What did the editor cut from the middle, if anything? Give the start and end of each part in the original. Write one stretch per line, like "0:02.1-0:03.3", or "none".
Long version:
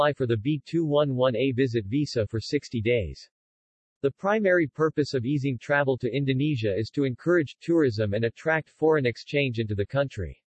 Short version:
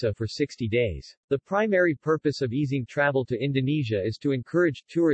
0:03.3-0:03.9